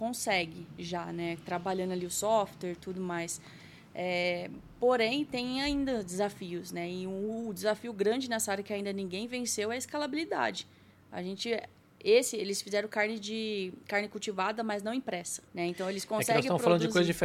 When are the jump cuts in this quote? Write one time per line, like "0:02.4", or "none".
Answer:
0:15.5

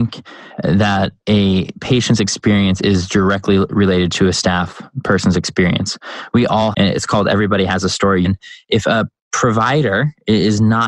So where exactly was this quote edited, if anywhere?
0:06.7
0:08.2

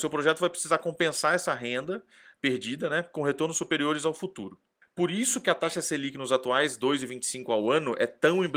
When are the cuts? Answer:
0:04.8

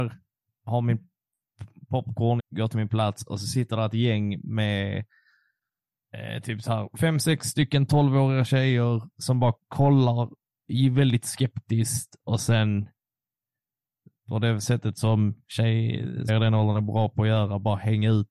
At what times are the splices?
0:02.4
0:16.3

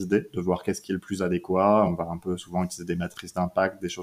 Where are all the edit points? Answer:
none

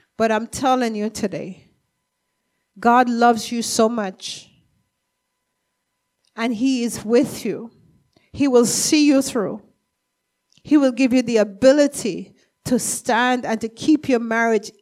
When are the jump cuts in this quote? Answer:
none

